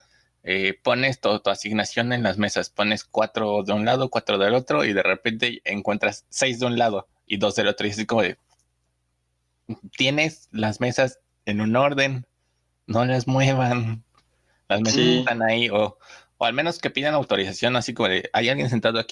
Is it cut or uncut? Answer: uncut